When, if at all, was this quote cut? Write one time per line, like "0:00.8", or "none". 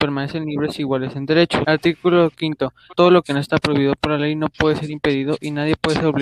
0:01.6
0:03.0